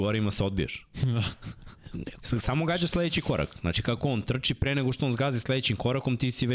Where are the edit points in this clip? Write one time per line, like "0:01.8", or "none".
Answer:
0:02.2